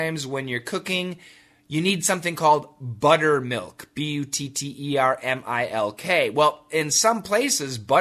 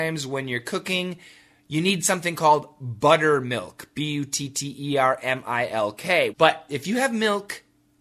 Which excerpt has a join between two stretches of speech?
second; 1 cut; at 6.3 s

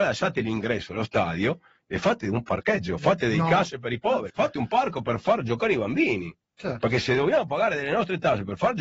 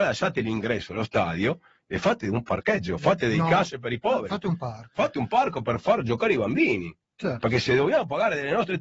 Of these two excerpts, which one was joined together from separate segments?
first; 1 cut; at 4.3 s

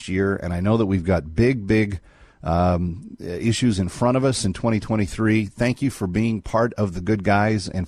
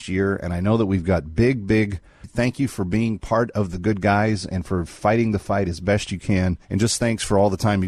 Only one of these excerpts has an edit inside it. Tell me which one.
second; 2 cuts; at 2.2 s, 6.6 s

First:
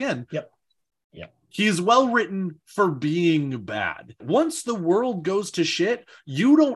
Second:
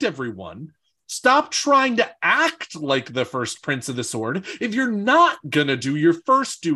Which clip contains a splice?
first; 2 cuts; at 0.9 s, 4.2 s

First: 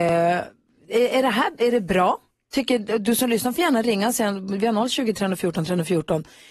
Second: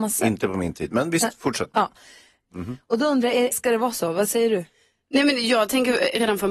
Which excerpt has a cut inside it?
second; 2 cuts; at 2.5 s, 3.5 s

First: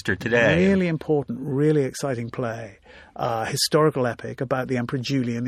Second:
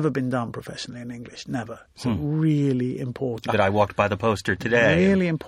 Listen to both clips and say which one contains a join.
second; 1 cut; at 3.5 s

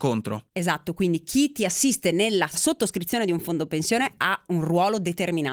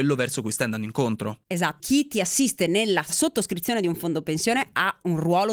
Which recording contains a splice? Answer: second; 1 cut; at 1.8 s

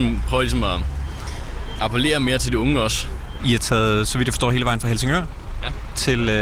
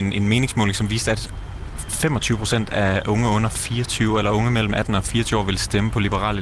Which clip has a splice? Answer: first; 1 cut; at 3.4 s

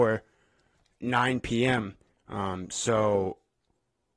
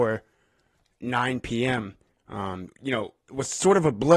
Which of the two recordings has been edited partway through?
second; 1 cut; at 2.7 s

